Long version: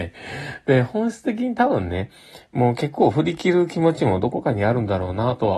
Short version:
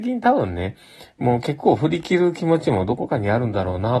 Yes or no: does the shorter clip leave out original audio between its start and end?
no